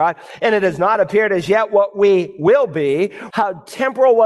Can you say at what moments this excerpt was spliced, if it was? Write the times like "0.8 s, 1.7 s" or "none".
3.3 s